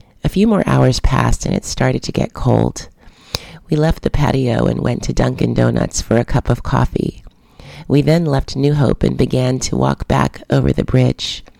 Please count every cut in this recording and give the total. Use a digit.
0